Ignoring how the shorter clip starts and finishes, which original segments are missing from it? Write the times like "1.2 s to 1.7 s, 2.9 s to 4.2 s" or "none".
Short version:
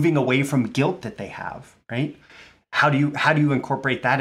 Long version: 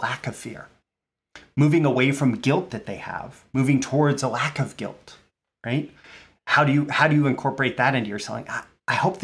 3.5 s to 5.6 s